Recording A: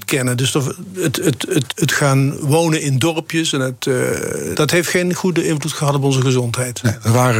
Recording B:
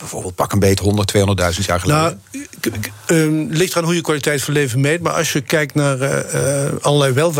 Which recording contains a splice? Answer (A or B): A